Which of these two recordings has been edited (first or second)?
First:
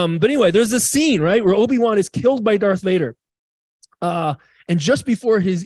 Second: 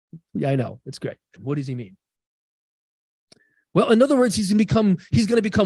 second